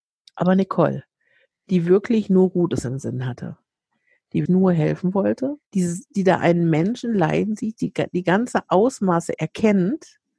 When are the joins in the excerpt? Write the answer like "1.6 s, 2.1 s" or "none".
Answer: 4.5 s, 5.6 s